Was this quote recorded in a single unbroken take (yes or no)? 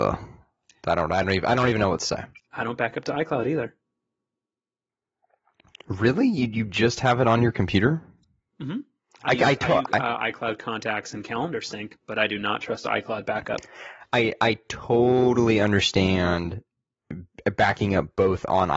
yes